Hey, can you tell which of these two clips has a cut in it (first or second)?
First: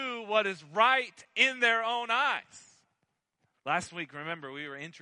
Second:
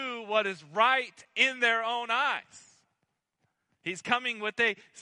first